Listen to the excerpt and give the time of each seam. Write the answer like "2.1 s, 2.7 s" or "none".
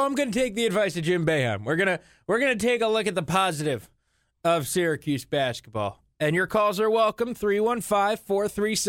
none